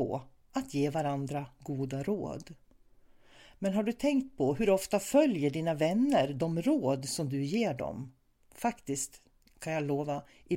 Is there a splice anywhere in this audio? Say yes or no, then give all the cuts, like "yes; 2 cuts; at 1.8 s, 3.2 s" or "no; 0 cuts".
no; 0 cuts